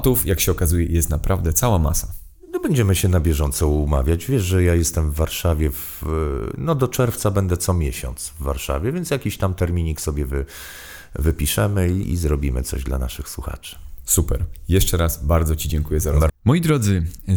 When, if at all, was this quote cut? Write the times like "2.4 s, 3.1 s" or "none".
12.0 s, 16.3 s